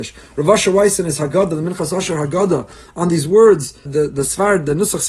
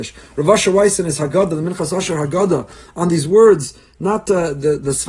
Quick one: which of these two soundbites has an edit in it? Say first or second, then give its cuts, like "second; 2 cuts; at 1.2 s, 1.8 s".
first; 1 cut; at 3.9 s